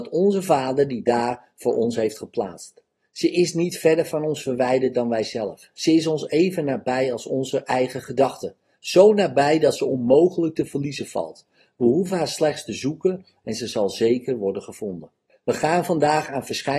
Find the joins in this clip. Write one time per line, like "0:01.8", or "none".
0:15.4